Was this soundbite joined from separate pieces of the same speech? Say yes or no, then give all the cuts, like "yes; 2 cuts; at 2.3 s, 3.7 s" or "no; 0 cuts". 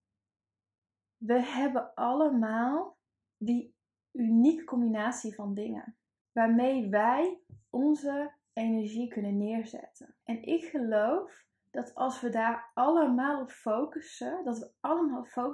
yes; 1 cut; at 10.2 s